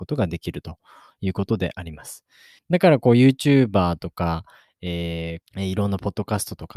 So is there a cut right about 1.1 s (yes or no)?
no